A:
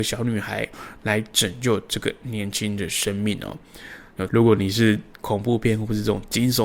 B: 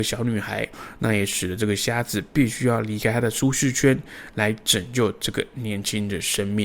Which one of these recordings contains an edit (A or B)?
A